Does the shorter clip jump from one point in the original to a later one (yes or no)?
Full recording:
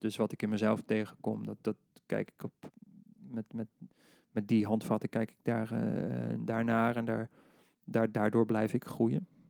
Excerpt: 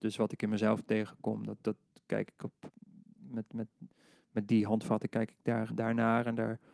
yes